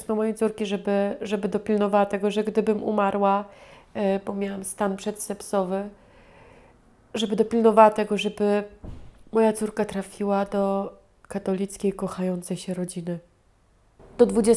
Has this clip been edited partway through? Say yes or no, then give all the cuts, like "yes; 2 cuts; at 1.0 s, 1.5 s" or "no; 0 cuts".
no; 0 cuts